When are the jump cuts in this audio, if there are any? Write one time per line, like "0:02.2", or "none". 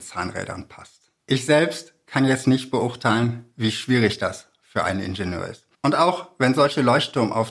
0:01.2
0:05.7